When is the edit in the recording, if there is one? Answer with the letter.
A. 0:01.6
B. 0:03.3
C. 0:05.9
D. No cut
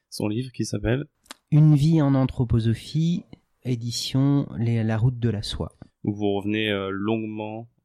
D